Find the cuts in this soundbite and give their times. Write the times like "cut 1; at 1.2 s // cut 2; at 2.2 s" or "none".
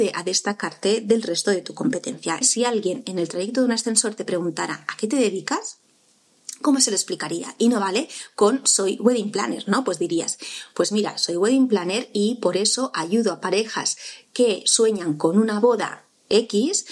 cut 1; at 2.4 s